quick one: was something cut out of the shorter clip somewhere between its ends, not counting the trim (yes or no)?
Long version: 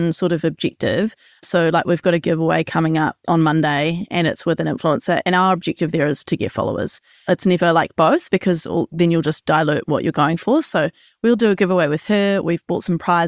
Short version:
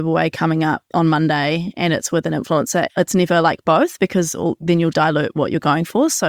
yes